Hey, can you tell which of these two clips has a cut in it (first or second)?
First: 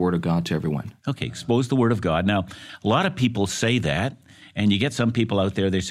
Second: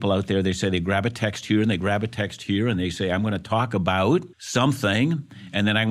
second